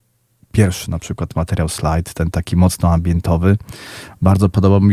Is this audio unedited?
yes; 0 cuts

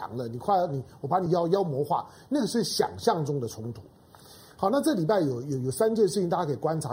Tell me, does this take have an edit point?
no; 0 cuts

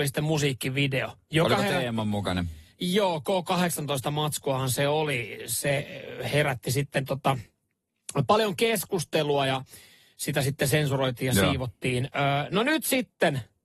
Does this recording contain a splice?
no; 0 cuts

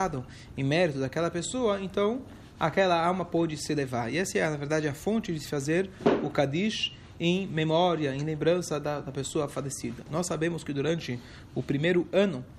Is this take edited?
no; 0 cuts

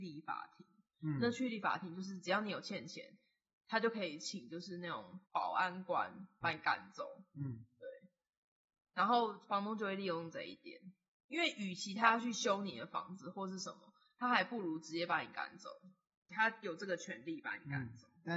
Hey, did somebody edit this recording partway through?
yes; 2 cuts; at 5.2 s, 6.4 s

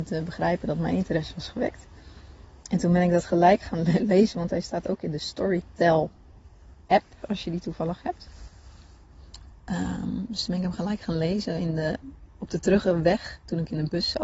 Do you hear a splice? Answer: no; 0 cuts

